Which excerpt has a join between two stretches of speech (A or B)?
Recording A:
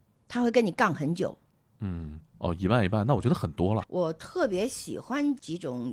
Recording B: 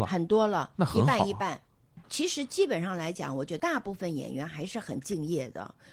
A